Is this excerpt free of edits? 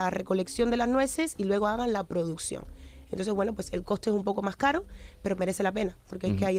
yes; 0 cuts

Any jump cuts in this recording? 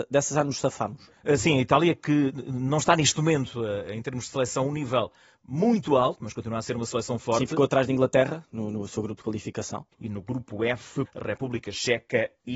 yes; 2 cuts; at 9.9 s, 11.0 s

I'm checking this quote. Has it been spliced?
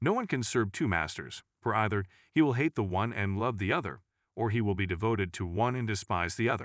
no; 0 cuts

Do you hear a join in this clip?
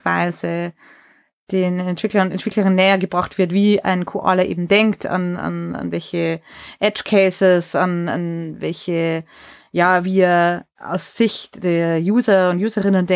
no; 0 cuts

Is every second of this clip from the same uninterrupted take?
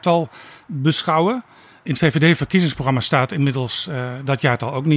yes; 0 cuts

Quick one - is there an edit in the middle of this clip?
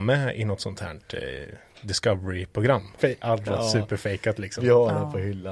yes; 1 cut; at 3.0 s

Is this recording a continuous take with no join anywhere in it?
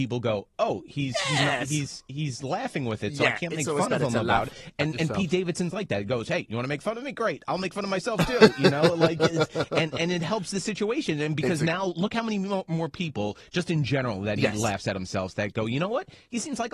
yes; 0 cuts

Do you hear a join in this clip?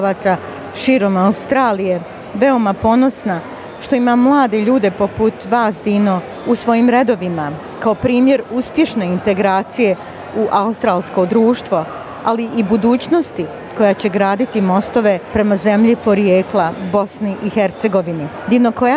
no; 0 cuts

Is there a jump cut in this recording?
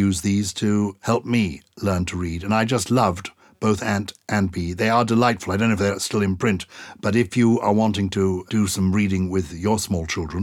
no; 0 cuts

